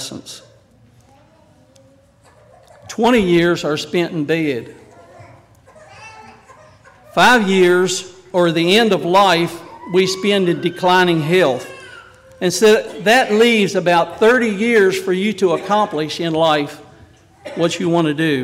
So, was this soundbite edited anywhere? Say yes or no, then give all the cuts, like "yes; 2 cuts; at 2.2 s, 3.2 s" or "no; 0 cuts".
no; 0 cuts